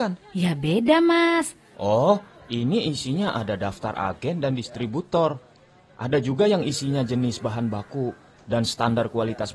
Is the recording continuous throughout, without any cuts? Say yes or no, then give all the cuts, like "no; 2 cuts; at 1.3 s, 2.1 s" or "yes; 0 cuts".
no; 1 cut; at 1.7 s